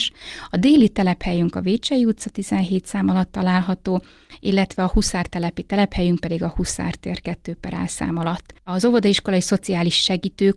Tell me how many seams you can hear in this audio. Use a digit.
1